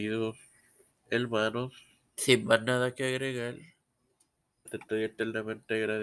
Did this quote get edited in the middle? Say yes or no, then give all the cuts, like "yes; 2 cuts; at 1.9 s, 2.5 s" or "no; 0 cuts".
yes; 2 cuts; at 2.1 s, 4.6 s